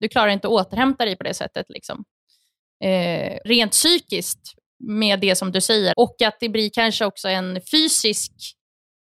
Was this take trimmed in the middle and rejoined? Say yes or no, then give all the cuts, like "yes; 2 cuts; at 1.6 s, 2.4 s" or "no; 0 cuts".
yes; 2 cuts; at 3.5 s, 5.9 s